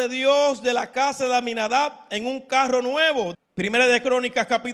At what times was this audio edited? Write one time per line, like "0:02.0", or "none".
0:03.3